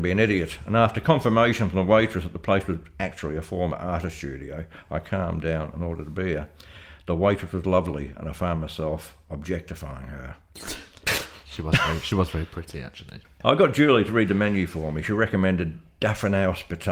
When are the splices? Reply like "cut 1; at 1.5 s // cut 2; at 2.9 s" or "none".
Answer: none